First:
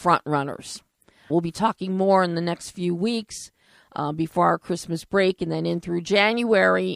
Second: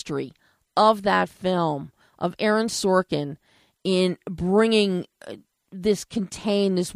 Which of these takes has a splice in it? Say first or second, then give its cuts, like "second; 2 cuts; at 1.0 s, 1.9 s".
first; 1 cut; at 1.3 s